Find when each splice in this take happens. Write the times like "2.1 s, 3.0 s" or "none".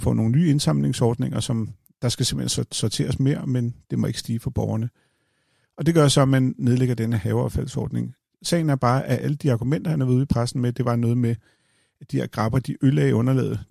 none